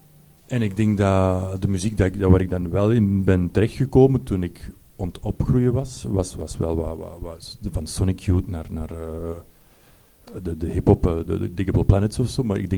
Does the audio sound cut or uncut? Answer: uncut